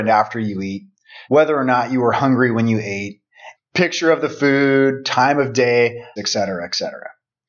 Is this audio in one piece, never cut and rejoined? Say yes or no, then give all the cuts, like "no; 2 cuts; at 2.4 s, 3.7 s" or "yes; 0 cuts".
no; 3 cuts; at 1.3 s, 3.5 s, 6.2 s